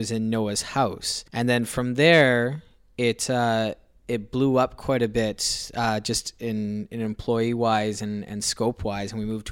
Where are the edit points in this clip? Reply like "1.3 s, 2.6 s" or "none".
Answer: 1.3 s

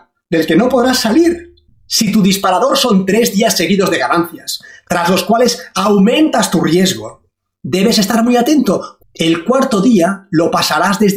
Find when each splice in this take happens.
9.0 s

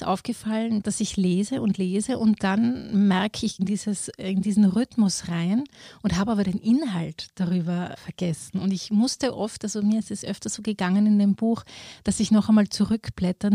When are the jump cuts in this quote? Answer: 3.6 s

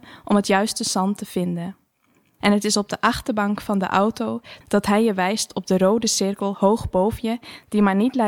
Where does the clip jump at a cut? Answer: 2.4 s, 4.6 s

